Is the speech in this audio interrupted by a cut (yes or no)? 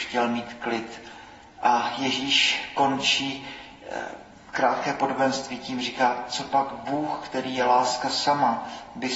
no